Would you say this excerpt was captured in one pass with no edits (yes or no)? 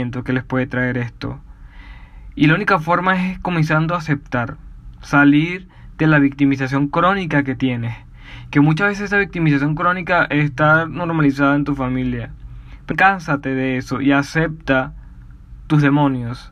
no